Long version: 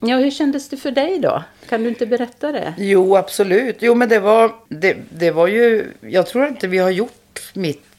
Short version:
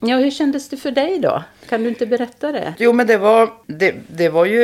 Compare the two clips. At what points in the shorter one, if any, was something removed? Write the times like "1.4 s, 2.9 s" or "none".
2.8 s